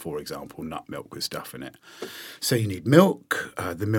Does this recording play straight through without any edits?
yes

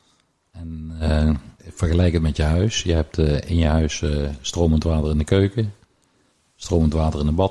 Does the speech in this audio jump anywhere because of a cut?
yes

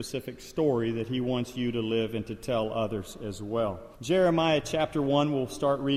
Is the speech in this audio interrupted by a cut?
yes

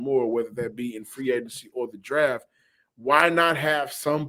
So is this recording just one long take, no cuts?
yes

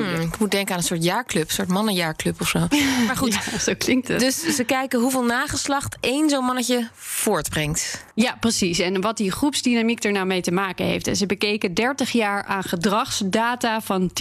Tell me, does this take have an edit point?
no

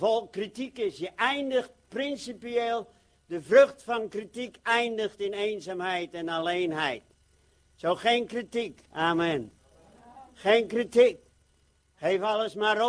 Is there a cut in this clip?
no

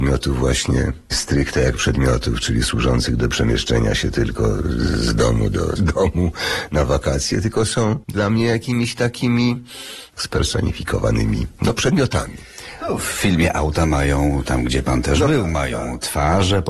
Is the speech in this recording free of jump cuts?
no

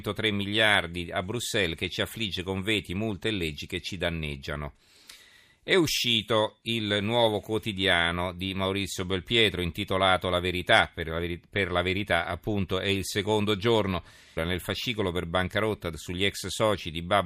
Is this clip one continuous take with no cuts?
no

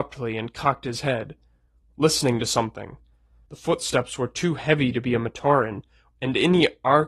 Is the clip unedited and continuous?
no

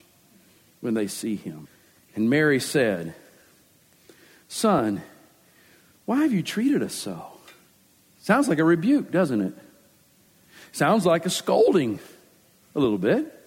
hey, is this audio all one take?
yes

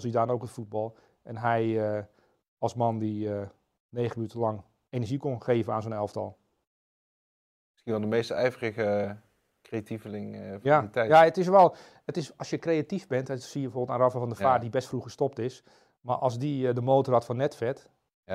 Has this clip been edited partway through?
no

